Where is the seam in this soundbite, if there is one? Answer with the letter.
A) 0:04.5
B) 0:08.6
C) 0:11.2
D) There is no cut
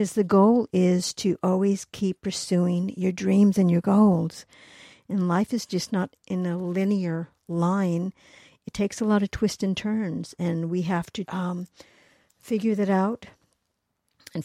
C